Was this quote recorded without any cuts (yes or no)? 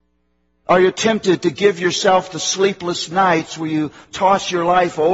yes